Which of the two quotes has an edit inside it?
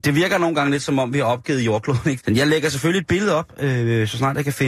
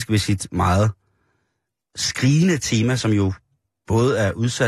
first; 1 cut; at 2.2 s

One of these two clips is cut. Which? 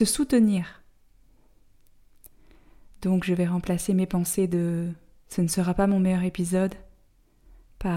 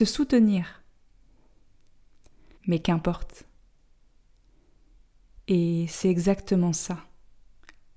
second; 1 cut; at 2.6 s

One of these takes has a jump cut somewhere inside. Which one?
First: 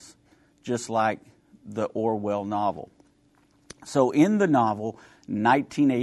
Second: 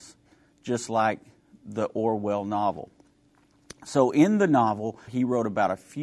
second; 1 cut; at 5.1 s

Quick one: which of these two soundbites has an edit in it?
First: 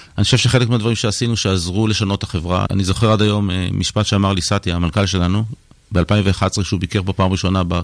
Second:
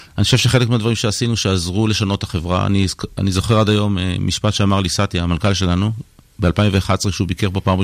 first; 1 cut; at 2.7 s

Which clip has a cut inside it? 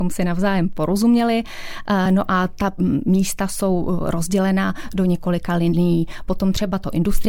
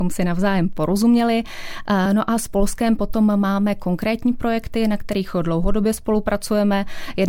second; 1 cut; at 2.1 s

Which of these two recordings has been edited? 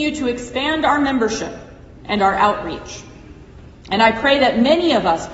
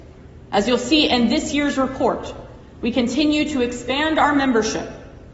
first; 1 cut; at 2.0 s

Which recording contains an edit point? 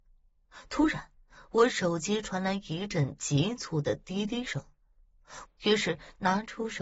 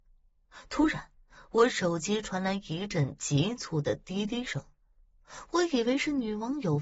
first; 1 cut; at 5.4 s

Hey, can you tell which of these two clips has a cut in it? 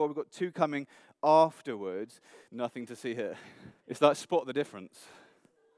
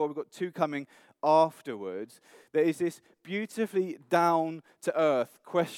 first; 2 cuts; at 2.5 s, 3.8 s

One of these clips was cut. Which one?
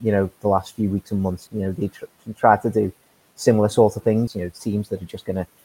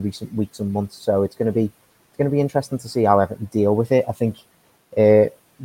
first; 2 cuts; at 1.5 s, 4.3 s

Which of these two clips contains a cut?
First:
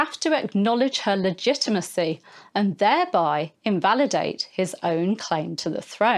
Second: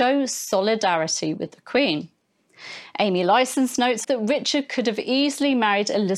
second; 1 cut; at 4.0 s

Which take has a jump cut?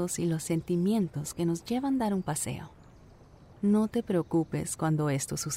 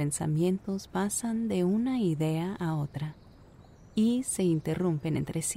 first; 1 cut; at 3.5 s

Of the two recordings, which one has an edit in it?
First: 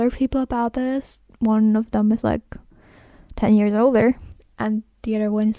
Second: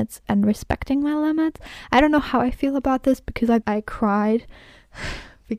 second; 1 cut; at 3.6 s

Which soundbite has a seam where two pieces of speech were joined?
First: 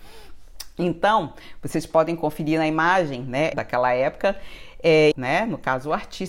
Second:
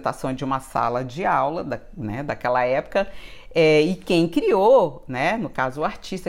first; 2 cuts; at 3.5 s, 5.1 s

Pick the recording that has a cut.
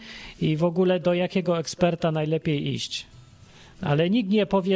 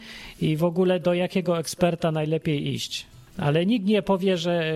second; 1 cut; at 3.3 s

